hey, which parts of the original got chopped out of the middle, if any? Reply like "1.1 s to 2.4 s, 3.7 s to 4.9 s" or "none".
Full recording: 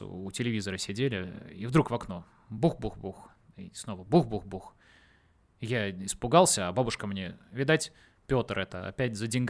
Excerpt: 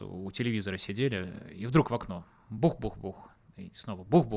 none